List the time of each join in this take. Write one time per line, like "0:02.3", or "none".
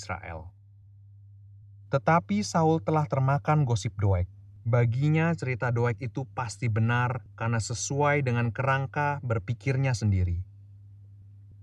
none